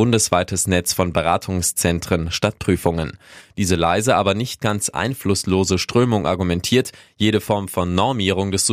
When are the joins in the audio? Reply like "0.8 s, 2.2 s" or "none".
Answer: 3.4 s